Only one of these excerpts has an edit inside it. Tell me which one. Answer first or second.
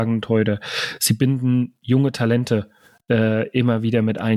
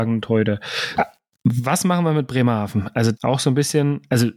second